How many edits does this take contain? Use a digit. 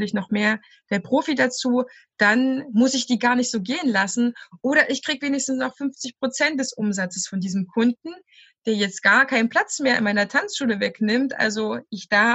0